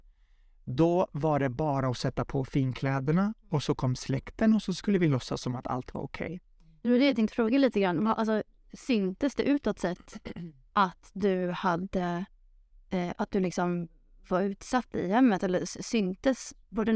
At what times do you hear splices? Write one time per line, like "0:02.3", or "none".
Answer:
none